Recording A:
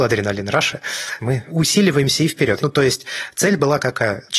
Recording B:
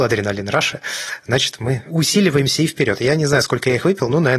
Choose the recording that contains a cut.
A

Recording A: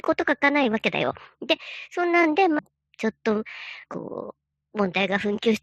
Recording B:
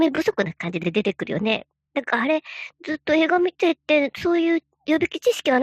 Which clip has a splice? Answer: A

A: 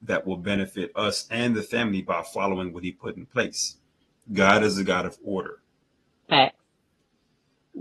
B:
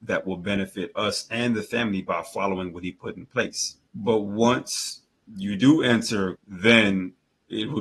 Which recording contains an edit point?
B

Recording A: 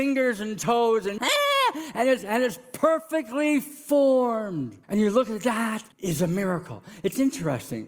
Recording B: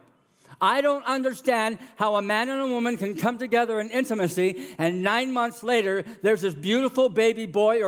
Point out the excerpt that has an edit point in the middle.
A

